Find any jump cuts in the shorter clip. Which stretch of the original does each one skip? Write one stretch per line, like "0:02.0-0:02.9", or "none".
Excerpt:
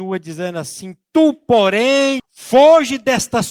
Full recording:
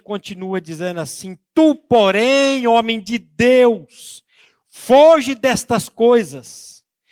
0:02.6-0:04.6